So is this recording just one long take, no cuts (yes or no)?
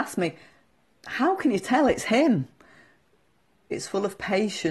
no